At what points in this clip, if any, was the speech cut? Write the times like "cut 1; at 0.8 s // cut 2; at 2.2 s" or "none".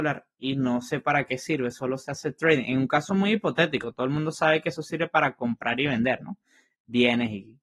none